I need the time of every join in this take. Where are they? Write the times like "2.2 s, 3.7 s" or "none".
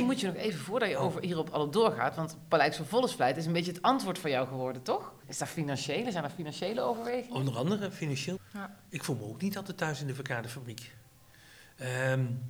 5.2 s, 8.4 s